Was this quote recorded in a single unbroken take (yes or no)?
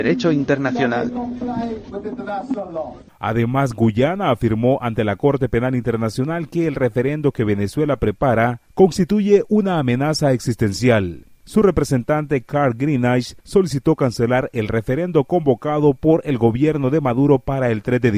yes